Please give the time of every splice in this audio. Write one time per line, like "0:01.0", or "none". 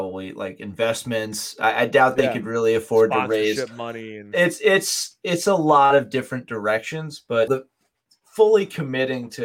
0:07.5